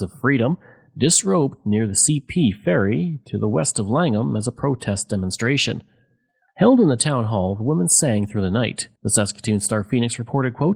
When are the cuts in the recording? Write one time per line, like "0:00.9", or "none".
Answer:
0:06.5
0:09.0